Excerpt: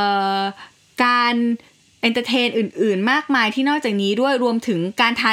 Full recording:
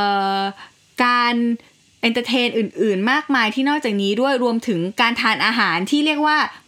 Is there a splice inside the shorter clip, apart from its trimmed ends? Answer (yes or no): no